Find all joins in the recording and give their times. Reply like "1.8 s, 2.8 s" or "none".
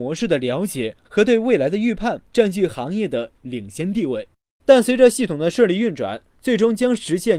2.3 s, 4.6 s